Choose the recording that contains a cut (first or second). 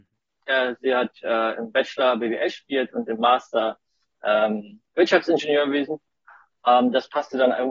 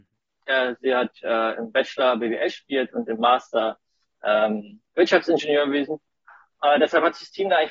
second